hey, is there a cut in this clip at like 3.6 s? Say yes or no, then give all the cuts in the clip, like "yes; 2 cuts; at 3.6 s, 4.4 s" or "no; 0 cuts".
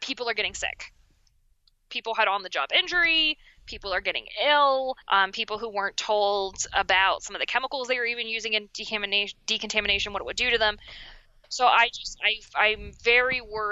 no; 1 cut; at 5.0 s